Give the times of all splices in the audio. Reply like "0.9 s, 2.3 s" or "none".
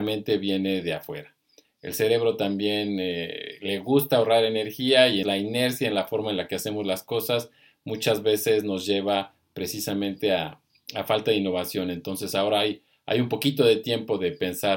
5.2 s

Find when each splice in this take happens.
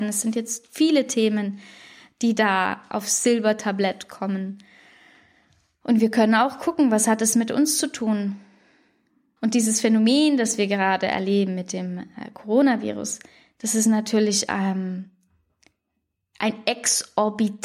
9.4 s

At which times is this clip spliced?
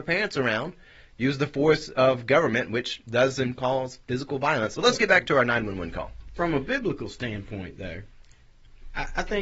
4.8 s

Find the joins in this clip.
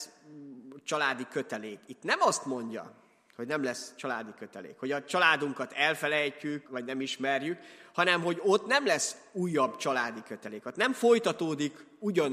6.7 s

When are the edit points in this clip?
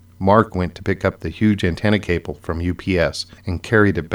none

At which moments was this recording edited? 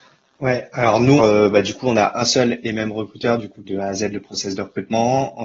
1.2 s, 3.6 s

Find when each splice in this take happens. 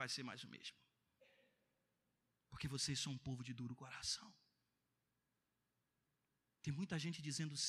none

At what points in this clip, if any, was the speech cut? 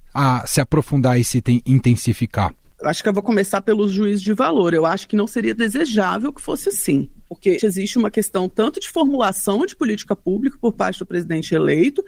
7.6 s

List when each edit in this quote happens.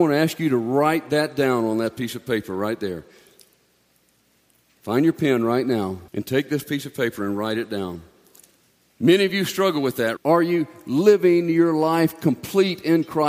6.1 s, 10.2 s

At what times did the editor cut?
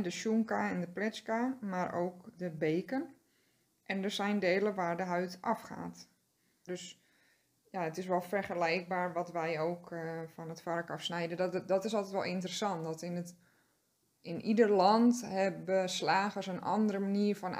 6.7 s

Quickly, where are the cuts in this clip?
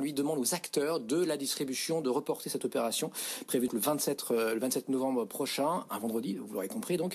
3.7 s

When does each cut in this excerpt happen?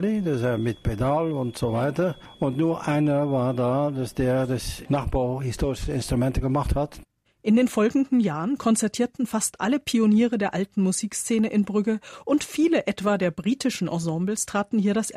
none

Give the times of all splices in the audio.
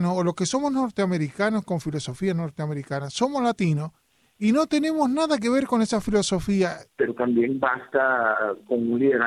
6.9 s

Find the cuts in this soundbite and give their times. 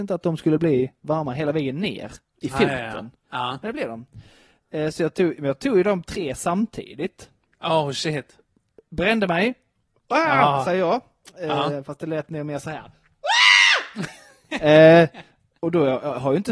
15.6 s

